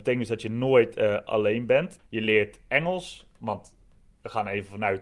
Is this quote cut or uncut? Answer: cut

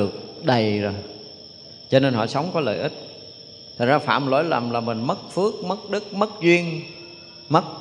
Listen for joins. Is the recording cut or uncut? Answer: uncut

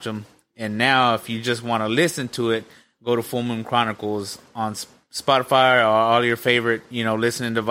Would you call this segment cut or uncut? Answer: uncut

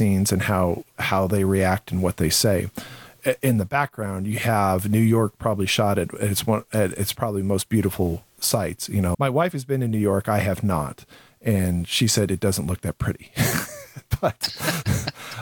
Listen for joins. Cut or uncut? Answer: cut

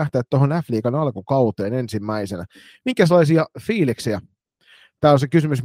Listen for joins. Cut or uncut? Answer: uncut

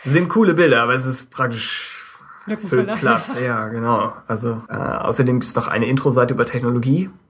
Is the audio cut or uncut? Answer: cut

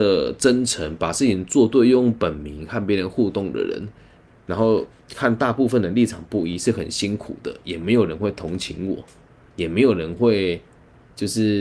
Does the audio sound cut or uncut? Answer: uncut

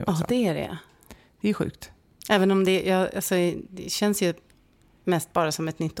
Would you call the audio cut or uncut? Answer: uncut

